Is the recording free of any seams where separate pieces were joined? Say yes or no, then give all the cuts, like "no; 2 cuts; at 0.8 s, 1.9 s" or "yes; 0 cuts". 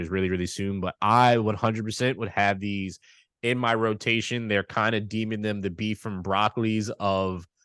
yes; 0 cuts